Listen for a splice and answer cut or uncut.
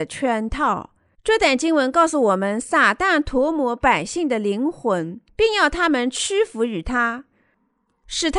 cut